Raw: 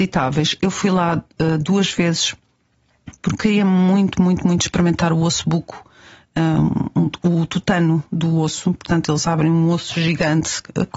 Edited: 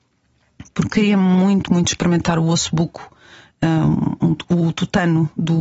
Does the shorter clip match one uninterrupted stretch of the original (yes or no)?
no